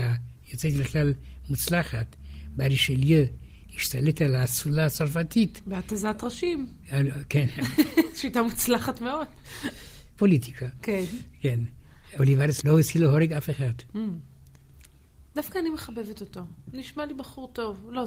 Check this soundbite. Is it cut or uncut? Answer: uncut